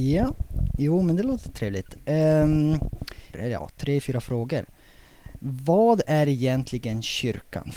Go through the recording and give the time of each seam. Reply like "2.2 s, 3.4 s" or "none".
3.3 s